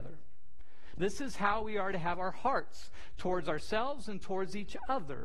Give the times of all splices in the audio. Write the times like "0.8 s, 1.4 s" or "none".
0.9 s